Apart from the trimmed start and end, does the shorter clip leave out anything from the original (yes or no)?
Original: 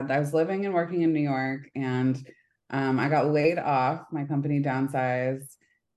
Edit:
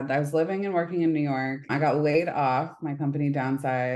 yes